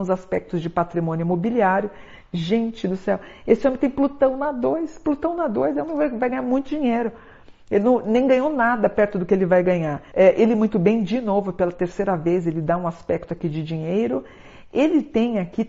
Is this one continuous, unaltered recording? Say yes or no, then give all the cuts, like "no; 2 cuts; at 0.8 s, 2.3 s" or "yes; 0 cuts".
no; 1 cut; at 10.1 s